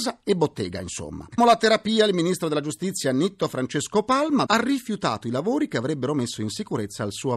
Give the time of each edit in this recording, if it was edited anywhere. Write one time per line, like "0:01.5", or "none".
0:01.4
0:04.5